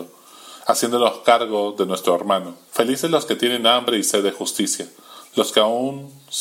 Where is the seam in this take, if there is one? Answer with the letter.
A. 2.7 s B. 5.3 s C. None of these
A